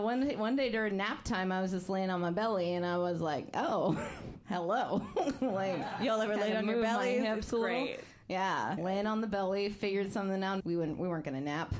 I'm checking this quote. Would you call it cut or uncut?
cut